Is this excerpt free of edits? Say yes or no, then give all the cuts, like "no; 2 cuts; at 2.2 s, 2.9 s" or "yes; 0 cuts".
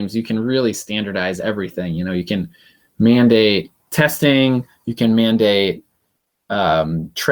yes; 0 cuts